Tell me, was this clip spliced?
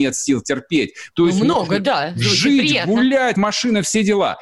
yes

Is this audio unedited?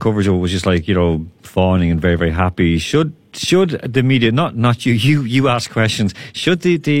yes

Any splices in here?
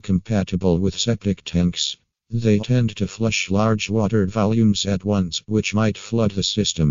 yes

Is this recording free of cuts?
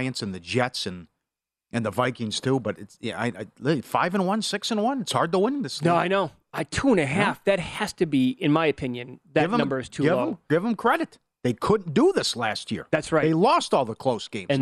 yes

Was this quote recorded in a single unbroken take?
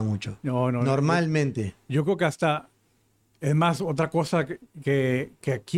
yes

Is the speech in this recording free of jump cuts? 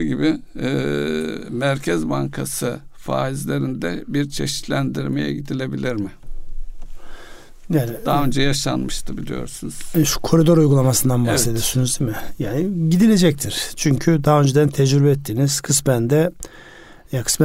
yes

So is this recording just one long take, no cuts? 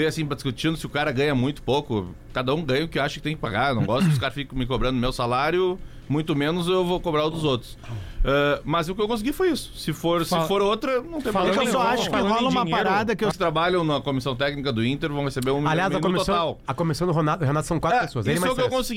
no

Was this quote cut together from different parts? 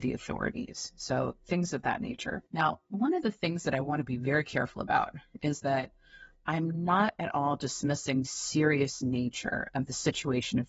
yes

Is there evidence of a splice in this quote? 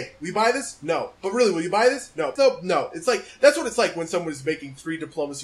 yes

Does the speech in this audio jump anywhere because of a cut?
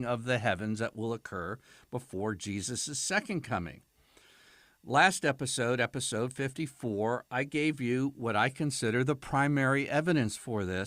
no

